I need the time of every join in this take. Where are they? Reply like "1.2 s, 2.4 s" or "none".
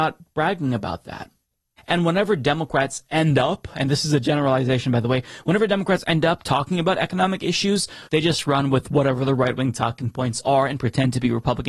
1.8 s, 8.1 s